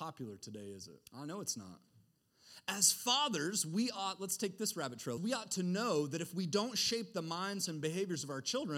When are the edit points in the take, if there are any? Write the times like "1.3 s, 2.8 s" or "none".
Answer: 1.1 s, 5.2 s, 7.7 s